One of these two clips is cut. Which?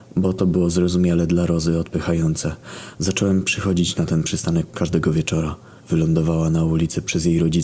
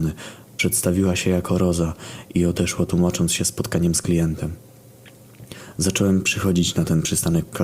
first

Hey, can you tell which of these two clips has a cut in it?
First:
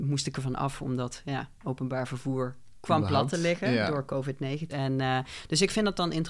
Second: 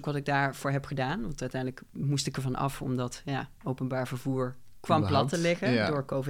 first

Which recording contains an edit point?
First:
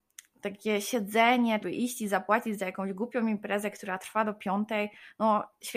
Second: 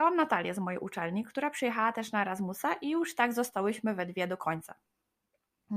first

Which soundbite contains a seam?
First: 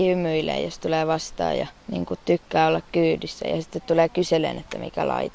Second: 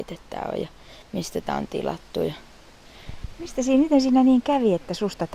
first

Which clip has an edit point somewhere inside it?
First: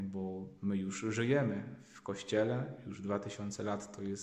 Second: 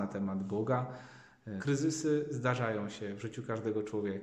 second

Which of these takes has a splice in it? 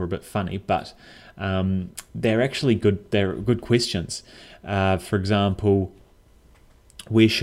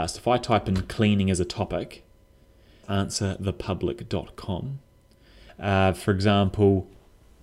second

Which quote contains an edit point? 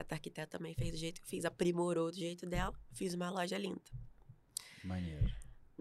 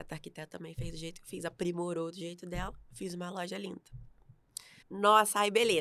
second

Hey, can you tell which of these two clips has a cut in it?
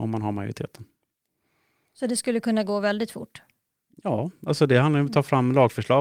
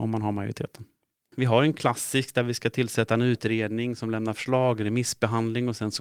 second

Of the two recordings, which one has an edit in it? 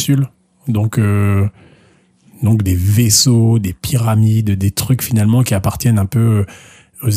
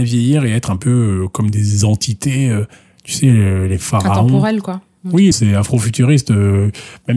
second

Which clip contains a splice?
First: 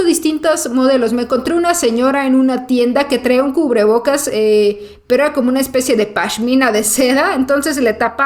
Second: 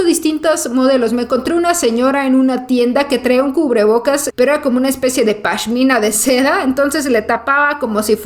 second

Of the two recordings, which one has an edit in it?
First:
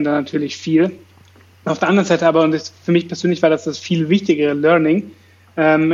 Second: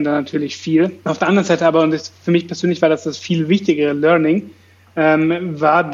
second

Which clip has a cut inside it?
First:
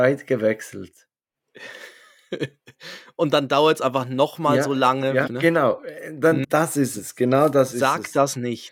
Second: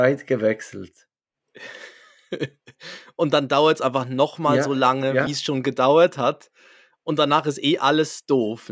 first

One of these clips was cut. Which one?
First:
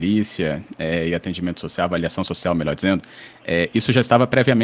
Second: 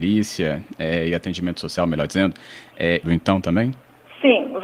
second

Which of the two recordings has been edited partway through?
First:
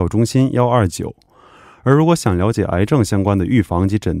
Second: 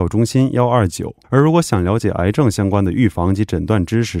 second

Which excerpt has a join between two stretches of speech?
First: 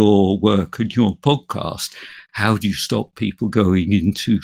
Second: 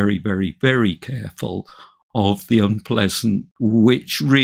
second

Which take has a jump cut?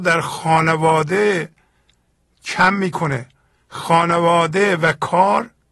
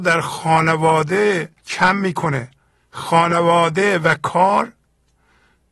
second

